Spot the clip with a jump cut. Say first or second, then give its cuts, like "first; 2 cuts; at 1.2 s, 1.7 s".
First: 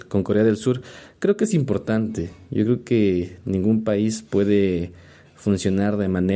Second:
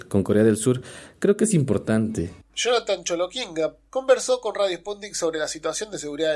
second; 2 cuts; at 2.4 s, 3.9 s